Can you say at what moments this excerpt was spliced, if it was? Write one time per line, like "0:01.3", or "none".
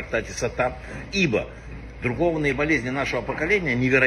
0:01.0